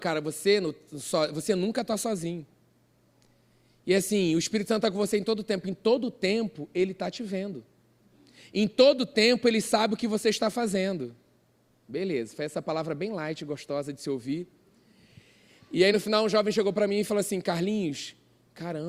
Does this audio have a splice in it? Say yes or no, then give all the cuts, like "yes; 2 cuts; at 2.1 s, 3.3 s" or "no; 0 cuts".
no; 0 cuts